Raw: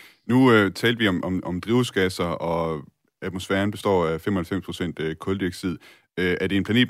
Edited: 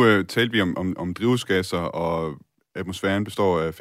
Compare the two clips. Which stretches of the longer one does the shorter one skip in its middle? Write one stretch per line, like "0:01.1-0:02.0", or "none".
none